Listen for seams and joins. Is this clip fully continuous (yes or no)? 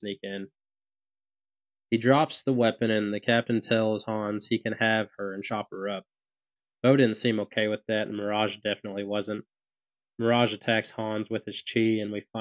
yes